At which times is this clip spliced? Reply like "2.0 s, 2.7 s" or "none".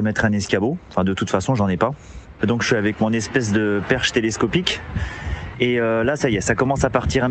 2.4 s, 5.5 s